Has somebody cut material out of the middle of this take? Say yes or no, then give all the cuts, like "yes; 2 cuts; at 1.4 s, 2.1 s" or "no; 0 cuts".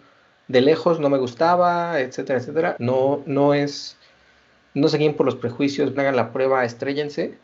yes; 2 cuts; at 2.8 s, 6.0 s